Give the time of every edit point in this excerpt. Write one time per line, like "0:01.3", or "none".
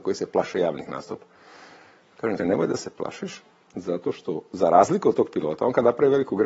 0:02.4